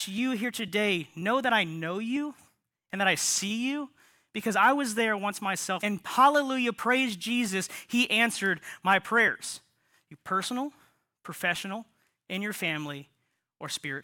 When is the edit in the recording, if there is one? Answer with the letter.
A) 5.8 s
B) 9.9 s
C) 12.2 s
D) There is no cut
A